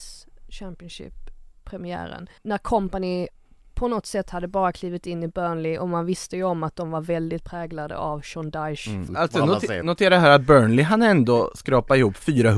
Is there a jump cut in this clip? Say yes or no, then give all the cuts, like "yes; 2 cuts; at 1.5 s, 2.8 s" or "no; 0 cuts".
yes; 2 cuts; at 2.4 s, 9.1 s